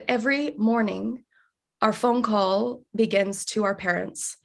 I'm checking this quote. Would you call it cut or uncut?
cut